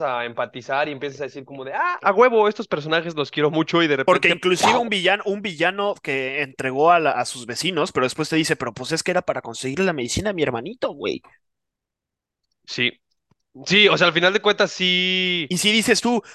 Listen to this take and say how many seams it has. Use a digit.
0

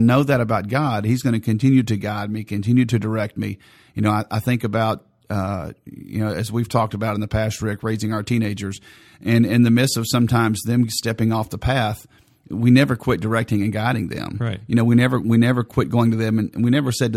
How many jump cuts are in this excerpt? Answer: 0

